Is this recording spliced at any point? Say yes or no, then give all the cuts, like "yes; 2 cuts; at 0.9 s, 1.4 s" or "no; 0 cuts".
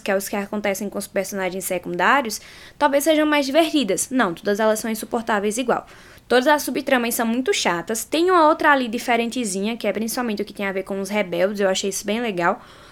no; 0 cuts